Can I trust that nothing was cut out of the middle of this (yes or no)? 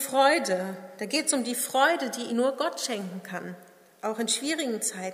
no